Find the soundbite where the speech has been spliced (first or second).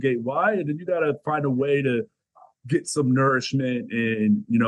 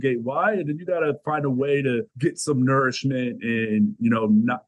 second